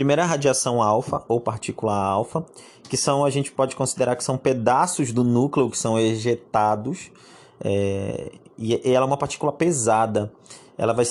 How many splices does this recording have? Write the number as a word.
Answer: zero